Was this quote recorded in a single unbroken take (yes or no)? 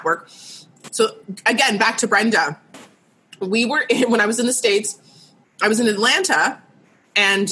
yes